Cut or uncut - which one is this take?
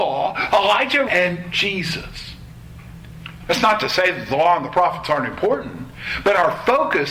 cut